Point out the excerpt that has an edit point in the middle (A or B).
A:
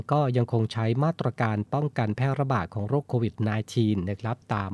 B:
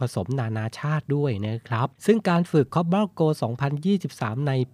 B